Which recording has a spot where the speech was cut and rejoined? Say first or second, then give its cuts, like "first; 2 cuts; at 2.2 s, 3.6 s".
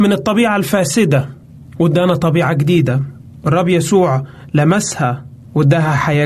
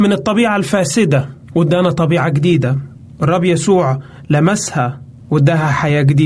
second; 1 cut; at 1.4 s